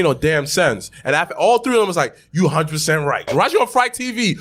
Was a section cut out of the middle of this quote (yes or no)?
yes